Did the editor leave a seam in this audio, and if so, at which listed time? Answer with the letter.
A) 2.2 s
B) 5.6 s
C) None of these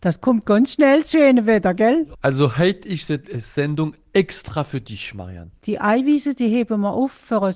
B